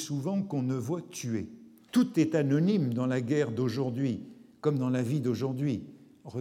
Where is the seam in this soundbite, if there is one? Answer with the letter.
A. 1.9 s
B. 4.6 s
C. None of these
A